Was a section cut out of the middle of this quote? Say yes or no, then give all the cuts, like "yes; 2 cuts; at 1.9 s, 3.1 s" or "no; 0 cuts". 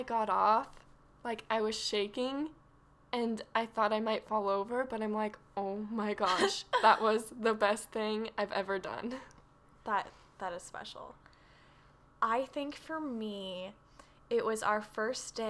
no; 0 cuts